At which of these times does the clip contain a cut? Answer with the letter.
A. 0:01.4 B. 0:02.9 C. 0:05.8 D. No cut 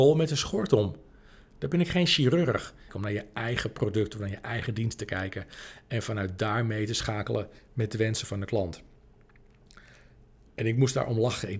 B